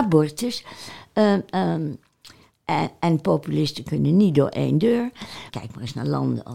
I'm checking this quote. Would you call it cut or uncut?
cut